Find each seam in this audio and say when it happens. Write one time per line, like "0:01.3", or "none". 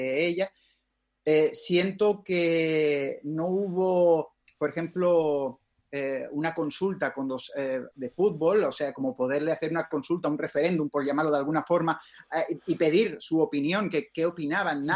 0:07.9